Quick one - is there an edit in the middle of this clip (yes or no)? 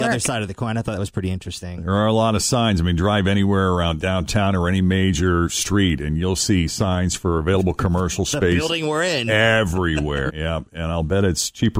yes